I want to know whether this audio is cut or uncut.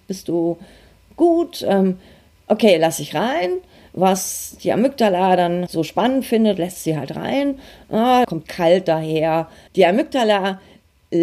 cut